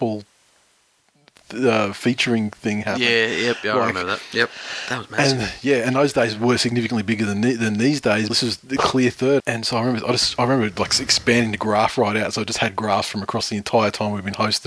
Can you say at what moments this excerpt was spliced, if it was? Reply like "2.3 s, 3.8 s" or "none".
8.3 s, 9.4 s